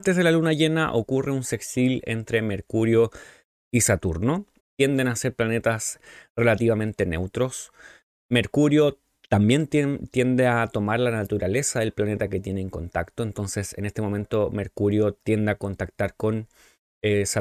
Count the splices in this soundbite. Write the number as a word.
one